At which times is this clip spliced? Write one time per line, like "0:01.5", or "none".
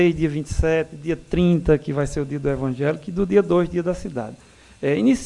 none